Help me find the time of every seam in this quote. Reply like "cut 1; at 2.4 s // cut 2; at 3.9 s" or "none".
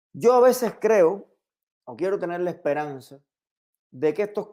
cut 1; at 1.7 s